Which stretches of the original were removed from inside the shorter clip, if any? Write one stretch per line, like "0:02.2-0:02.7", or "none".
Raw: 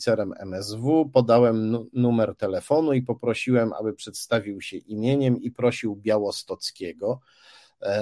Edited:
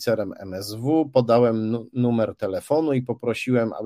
none